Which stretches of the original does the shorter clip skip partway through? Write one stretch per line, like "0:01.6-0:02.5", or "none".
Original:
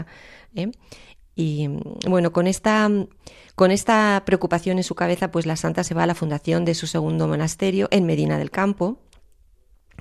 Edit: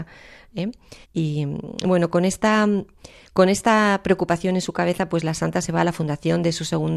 0:01.0-0:01.2